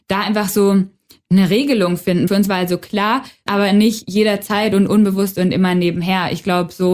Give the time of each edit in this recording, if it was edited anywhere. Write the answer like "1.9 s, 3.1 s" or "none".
2.3 s, 3.5 s